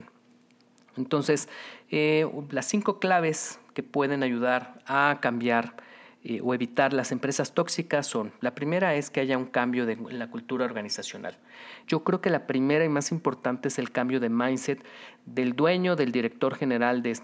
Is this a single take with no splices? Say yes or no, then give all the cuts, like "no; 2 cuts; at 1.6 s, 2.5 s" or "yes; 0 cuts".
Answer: no; 1 cut; at 11.8 s